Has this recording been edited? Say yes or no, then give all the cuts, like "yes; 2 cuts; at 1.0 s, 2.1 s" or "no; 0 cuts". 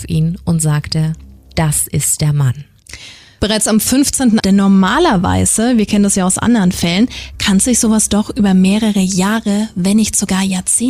yes; 1 cut; at 4.4 s